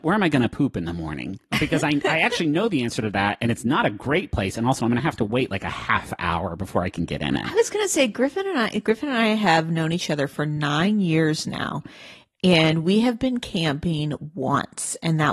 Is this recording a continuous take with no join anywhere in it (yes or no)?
yes